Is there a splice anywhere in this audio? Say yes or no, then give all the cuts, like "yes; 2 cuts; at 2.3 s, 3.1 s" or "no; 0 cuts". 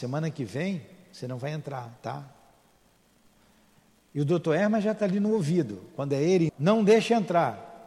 yes; 1 cut; at 6.5 s